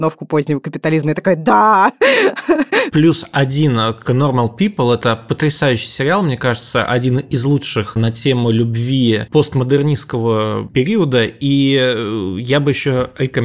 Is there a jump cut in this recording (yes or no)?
no